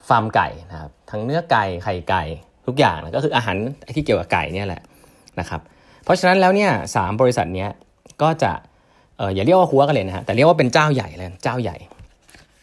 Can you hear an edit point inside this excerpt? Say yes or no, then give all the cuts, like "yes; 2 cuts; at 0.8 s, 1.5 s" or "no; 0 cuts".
no; 0 cuts